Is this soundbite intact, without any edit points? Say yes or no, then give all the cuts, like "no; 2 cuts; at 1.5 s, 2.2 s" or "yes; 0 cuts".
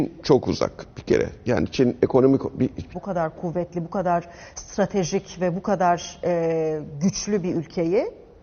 no; 1 cut; at 2.9 s